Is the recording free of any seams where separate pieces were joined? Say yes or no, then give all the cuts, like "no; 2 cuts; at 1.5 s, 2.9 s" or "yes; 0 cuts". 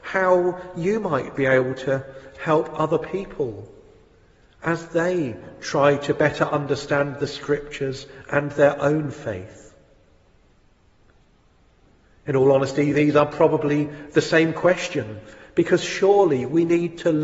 yes; 0 cuts